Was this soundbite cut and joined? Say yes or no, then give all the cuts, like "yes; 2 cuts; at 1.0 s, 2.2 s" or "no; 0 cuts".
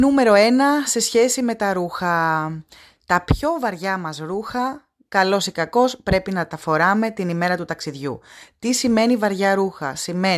no; 0 cuts